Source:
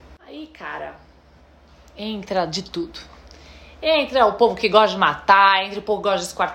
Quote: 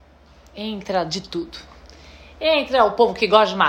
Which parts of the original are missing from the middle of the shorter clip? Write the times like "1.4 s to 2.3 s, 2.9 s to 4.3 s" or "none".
none